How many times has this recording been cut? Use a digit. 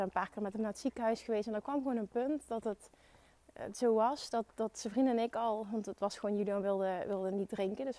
1